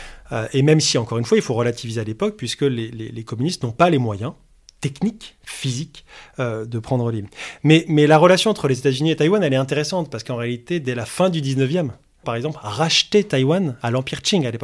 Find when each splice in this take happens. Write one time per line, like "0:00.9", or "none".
0:12.2